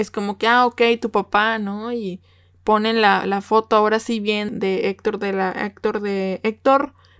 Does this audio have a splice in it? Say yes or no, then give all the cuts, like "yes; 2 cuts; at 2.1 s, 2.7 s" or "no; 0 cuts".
yes; 1 cut; at 4.5 s